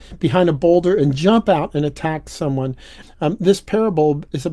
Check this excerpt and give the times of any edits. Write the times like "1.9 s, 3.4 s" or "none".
3.0 s